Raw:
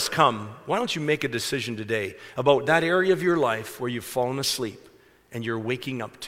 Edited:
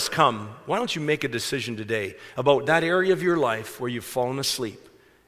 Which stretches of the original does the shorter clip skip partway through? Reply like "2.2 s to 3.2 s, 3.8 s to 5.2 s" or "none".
none